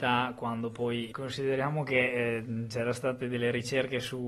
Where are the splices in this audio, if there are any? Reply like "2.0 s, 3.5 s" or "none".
1.1 s

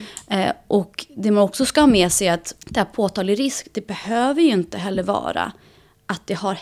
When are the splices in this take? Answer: 2.6 s

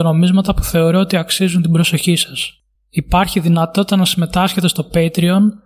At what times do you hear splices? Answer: 2.8 s

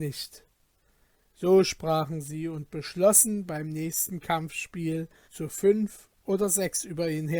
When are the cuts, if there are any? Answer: 1.3 s, 5.2 s

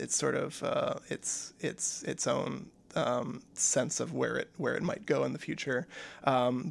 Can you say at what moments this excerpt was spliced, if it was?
none

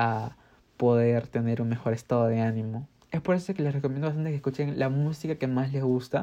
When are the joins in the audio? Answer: none

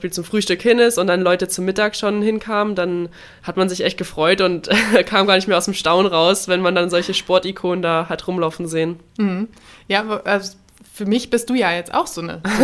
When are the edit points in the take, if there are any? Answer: none

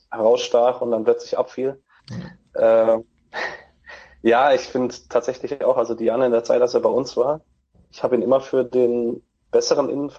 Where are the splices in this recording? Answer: 2.0 s

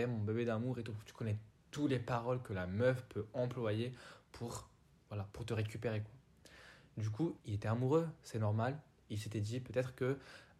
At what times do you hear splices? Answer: 7.4 s

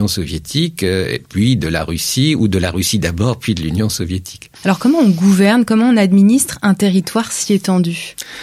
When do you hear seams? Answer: 4.6 s

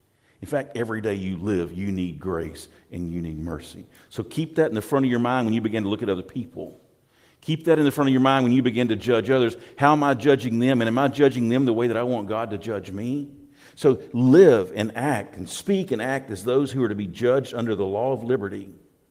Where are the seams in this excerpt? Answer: none

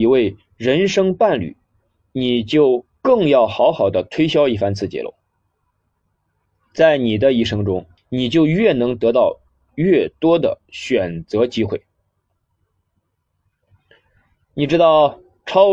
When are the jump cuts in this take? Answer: 8.0 s

